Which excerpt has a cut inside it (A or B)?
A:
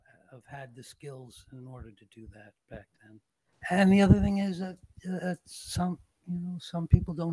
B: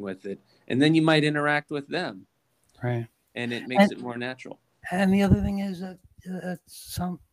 A